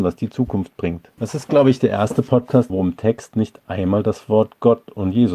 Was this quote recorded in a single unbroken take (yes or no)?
no